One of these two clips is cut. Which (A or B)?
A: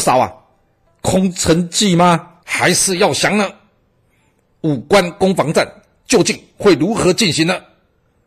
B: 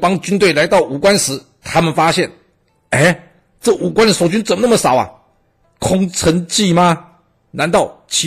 A